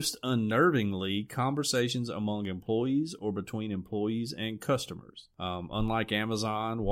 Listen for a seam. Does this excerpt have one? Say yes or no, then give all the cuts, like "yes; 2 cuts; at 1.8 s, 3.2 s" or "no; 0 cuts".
no; 0 cuts